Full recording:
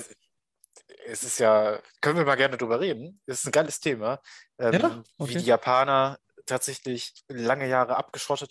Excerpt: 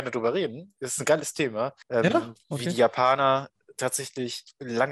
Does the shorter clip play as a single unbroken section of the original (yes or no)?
no